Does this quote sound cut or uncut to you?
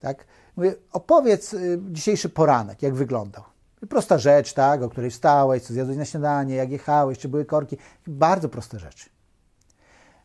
uncut